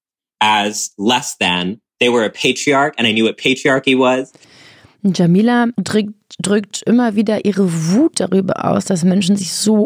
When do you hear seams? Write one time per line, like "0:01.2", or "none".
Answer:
0:05.8

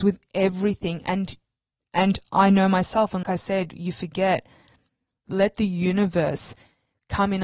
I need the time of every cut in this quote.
0:03.2
0:05.3

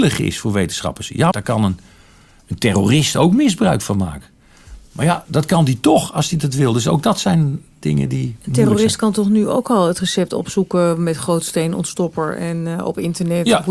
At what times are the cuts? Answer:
0:01.3

